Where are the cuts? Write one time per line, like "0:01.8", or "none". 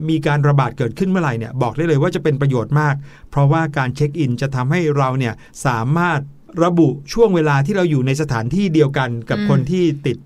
none